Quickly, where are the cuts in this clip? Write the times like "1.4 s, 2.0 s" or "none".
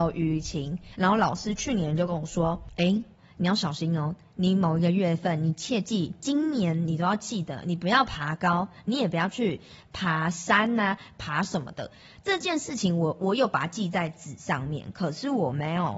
0.9 s